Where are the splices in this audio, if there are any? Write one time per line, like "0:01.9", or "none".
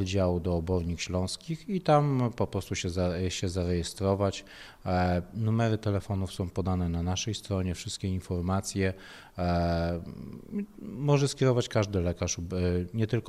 none